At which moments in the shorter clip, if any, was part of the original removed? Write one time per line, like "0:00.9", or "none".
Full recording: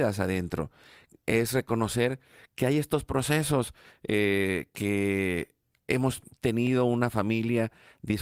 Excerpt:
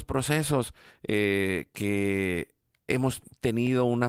none